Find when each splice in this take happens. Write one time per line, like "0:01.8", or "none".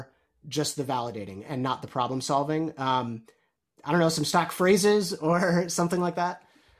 none